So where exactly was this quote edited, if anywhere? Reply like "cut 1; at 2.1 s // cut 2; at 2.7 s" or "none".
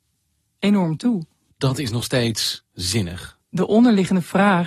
cut 1; at 1.5 s // cut 2; at 3.4 s